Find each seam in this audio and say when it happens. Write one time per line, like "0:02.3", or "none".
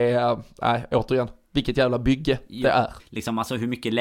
0:03.0